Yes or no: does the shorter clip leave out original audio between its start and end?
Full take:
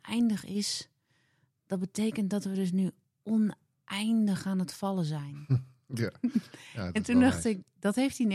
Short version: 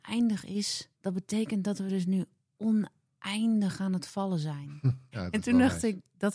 yes